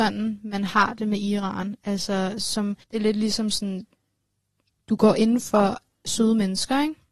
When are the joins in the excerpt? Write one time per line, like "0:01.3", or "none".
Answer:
0:02.8
0:04.8